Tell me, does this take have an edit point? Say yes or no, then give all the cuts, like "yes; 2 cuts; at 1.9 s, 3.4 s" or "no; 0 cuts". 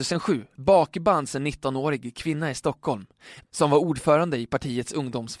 yes; 1 cut; at 3.4 s